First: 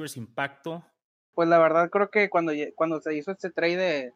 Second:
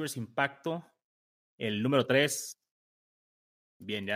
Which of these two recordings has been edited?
first; 1 cut; at 1.3 s

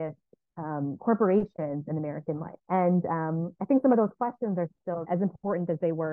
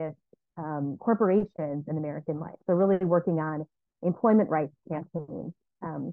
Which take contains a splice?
first; 2 cuts; at 2.6 s, 5.0 s

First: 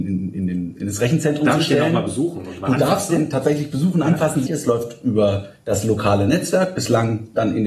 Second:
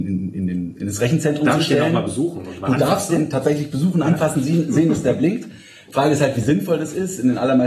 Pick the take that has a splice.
first; 1 cut; at 4.5 s

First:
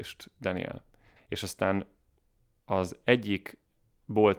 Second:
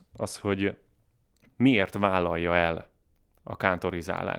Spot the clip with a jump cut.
first; 1 cut; at 1.2 s

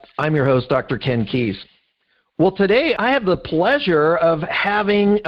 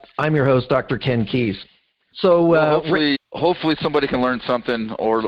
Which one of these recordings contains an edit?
second; 2 cuts; at 2.1 s, 3.1 s

